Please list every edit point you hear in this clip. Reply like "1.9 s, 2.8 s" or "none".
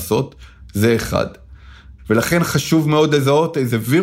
2.0 s